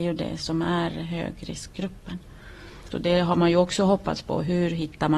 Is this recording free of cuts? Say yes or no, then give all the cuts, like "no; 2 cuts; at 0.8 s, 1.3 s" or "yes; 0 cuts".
no; 1 cut; at 2.9 s